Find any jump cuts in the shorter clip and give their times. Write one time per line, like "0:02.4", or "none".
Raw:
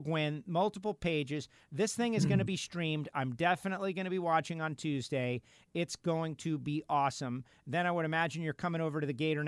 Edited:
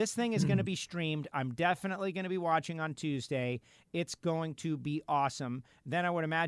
none